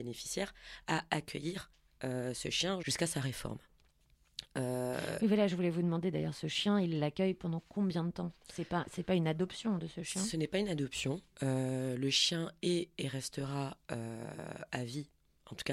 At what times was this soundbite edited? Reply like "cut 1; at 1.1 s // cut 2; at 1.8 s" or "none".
cut 1; at 2.8 s